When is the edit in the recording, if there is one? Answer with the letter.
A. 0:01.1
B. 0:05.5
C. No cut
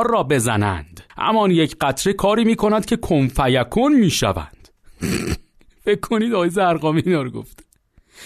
A